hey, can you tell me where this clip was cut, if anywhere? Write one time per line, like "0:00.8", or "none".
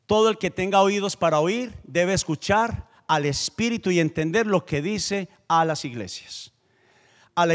none